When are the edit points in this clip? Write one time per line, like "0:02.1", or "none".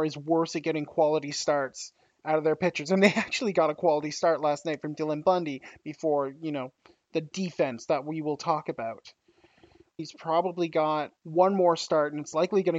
0:10.0
0:11.2